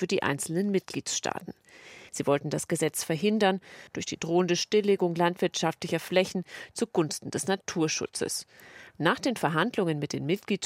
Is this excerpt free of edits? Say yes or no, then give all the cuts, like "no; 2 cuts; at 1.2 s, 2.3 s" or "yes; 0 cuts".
no; 2 cuts; at 2.1 s, 3.9 s